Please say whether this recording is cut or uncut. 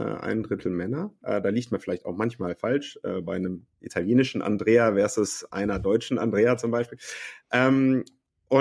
cut